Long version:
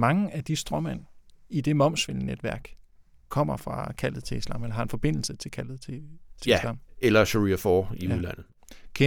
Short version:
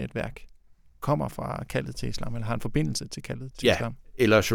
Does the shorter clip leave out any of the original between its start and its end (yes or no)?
yes